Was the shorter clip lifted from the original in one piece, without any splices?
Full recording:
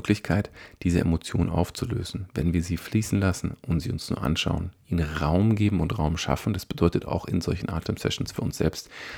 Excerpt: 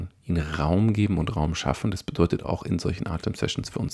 yes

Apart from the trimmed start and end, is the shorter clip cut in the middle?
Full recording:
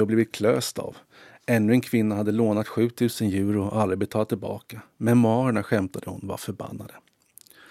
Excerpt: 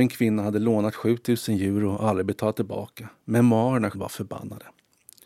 yes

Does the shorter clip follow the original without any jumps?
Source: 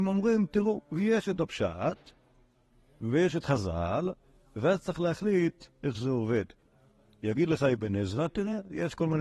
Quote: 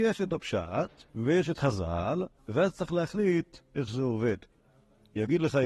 no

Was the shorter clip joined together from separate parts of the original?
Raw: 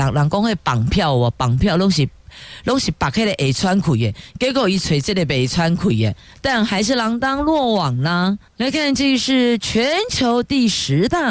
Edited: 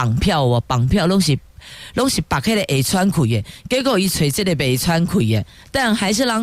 no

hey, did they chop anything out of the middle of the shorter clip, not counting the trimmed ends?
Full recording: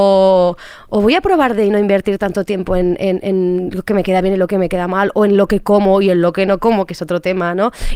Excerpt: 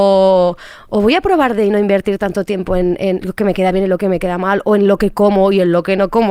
yes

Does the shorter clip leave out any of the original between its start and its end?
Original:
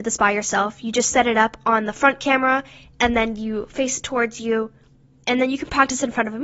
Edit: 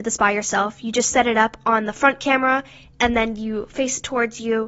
no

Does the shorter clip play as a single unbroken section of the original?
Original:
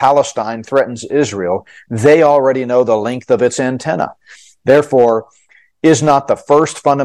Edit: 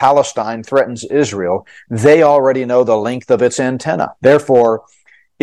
no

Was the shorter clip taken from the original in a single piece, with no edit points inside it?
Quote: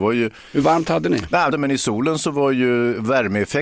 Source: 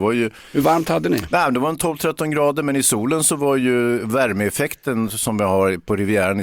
no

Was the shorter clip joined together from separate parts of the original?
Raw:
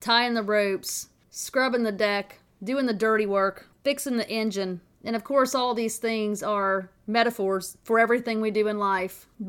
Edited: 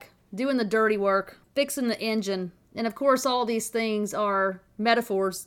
no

